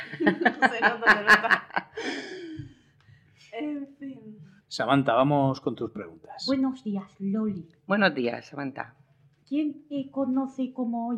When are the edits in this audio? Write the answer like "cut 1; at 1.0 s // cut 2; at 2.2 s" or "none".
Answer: cut 1; at 4.6 s